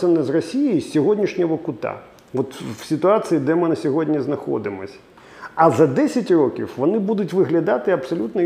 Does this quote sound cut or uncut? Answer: uncut